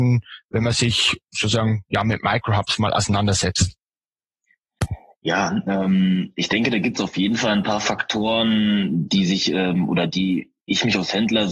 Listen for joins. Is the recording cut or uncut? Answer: uncut